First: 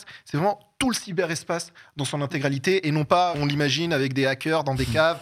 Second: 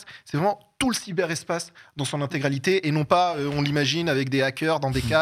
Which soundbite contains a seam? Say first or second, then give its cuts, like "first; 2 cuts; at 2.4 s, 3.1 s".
first; 1 cut; at 3.3 s